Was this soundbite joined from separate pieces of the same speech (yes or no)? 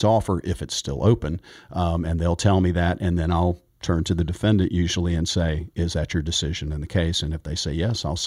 no